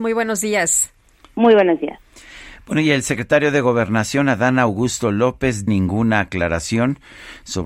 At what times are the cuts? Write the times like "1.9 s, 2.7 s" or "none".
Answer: 5.7 s